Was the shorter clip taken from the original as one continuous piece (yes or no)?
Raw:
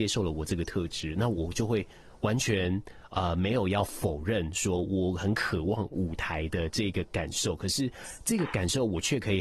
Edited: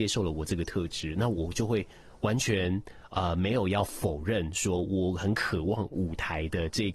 yes